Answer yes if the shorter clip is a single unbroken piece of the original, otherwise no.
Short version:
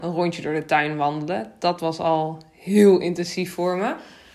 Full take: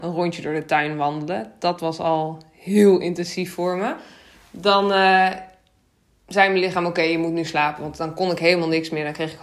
yes